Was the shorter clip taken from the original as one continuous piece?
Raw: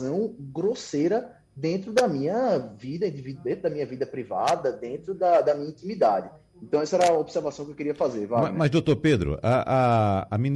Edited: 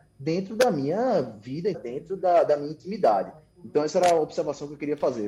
no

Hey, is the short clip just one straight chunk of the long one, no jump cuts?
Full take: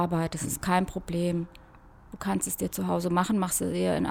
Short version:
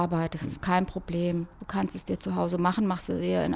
no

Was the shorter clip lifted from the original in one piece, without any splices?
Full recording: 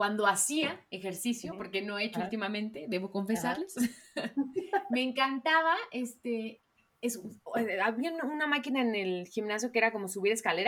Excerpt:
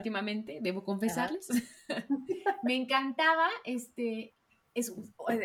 yes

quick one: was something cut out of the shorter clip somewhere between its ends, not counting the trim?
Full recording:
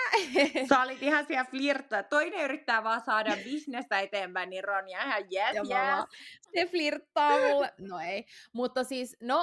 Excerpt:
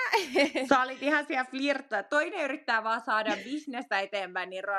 no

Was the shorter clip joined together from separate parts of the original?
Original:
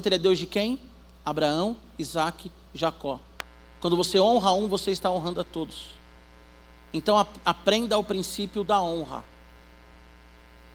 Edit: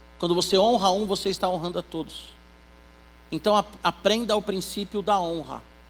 no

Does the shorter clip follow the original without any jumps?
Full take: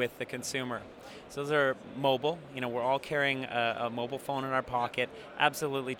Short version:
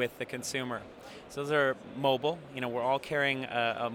yes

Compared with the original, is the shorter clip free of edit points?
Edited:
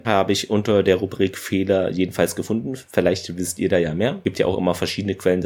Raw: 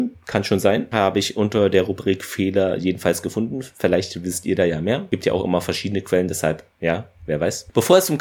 yes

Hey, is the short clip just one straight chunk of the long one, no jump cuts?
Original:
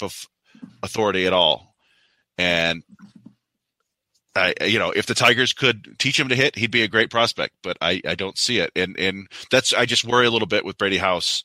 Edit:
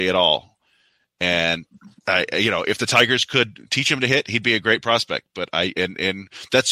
no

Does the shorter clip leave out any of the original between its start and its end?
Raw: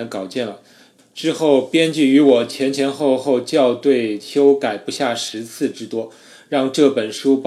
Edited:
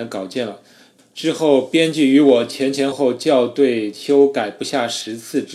yes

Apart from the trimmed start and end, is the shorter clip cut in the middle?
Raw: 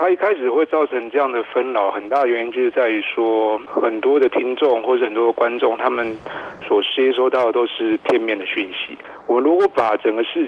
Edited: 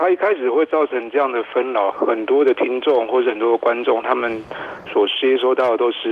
yes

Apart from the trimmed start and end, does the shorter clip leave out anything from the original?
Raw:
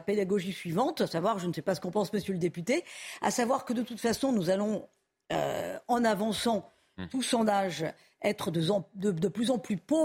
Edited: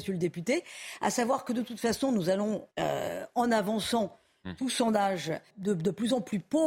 yes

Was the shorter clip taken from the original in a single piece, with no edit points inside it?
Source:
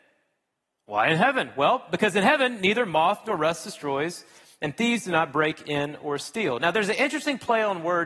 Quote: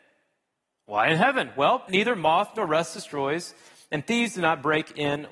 no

